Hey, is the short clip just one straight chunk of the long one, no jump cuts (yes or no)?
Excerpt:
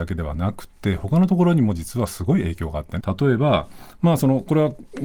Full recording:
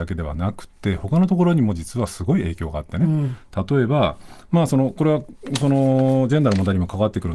no